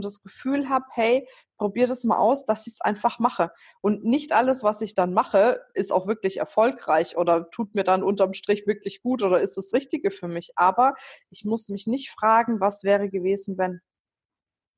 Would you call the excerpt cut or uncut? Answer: uncut